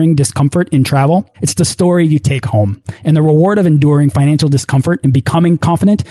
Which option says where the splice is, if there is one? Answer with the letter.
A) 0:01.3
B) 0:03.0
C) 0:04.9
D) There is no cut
A